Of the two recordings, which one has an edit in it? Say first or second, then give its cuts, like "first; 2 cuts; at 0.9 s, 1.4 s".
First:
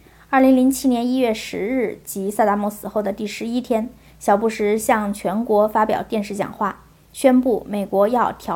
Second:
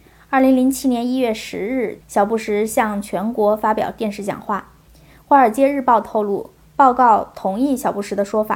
second; 2 cuts; at 2.0 s, 4.9 s